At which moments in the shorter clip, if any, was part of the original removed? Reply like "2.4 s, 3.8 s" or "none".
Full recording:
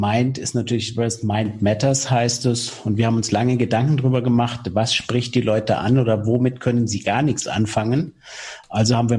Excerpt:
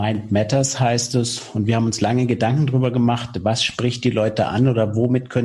none